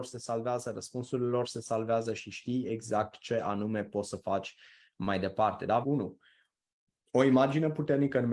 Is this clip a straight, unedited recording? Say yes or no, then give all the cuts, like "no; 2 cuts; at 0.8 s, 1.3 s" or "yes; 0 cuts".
no; 1 cut; at 5.8 s